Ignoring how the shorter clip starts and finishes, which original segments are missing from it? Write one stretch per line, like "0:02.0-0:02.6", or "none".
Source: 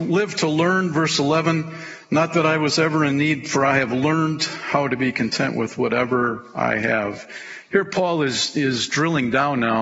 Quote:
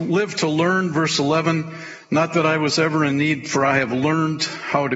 none